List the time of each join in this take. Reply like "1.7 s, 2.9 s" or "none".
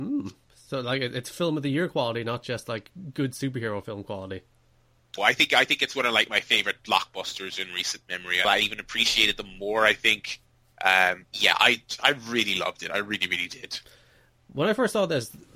5.2 s, 8.4 s